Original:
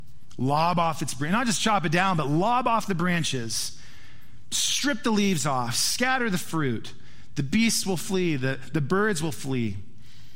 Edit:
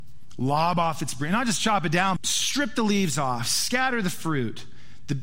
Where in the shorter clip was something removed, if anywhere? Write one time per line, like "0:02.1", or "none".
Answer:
0:02.2